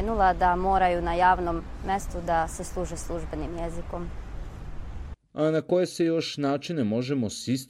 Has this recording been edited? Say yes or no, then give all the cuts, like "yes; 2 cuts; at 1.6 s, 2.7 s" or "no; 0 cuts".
no; 0 cuts